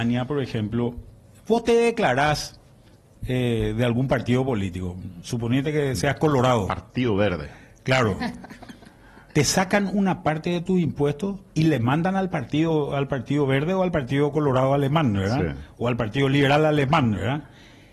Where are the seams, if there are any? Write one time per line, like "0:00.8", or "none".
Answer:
none